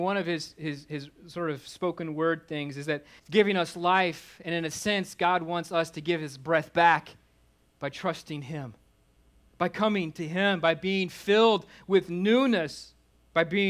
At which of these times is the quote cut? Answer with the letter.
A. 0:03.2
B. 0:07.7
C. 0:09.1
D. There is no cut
A